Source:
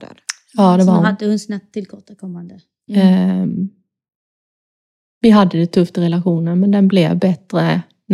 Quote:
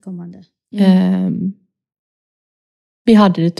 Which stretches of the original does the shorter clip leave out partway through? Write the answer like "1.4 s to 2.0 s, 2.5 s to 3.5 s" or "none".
none